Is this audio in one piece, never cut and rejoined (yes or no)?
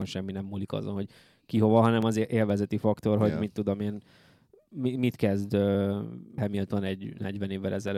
no